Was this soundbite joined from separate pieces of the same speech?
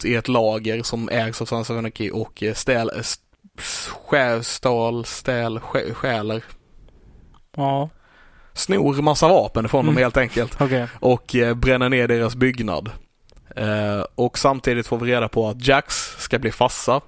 no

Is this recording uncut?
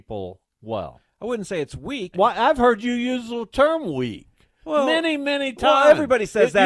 no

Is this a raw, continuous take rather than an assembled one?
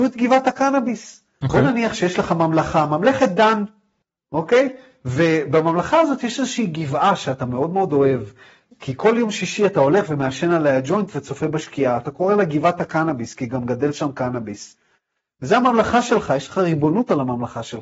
no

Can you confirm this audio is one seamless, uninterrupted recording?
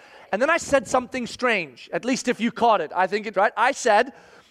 no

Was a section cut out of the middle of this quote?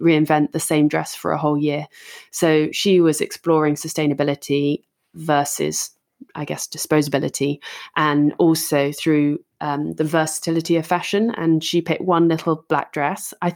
no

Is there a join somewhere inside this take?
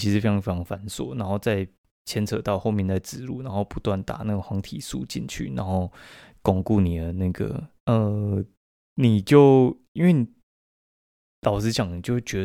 yes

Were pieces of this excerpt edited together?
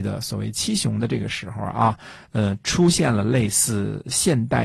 no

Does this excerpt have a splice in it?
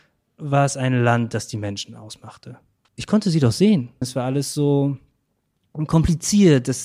yes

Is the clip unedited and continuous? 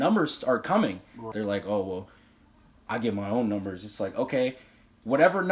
no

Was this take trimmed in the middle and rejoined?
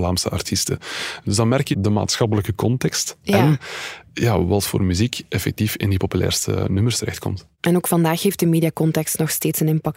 yes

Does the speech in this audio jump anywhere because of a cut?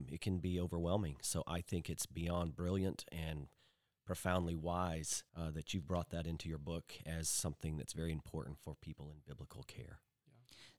yes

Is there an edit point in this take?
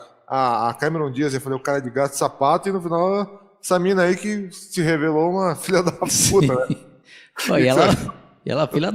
no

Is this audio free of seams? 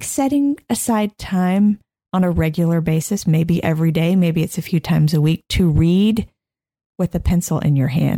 yes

